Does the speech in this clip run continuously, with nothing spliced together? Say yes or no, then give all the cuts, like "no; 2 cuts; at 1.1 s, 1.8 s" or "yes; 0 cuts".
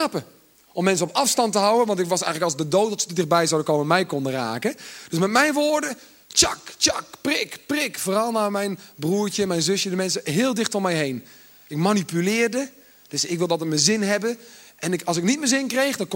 yes; 0 cuts